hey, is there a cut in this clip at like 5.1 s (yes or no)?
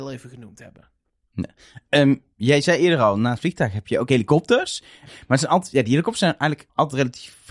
yes